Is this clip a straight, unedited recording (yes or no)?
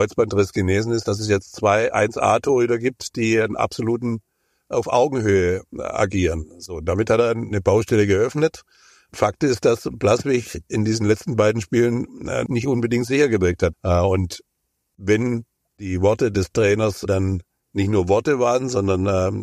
no